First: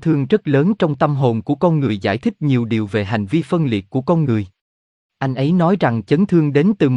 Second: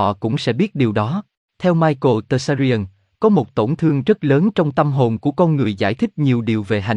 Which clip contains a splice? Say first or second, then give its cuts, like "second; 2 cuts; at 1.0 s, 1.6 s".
second; 1 cut; at 1.4 s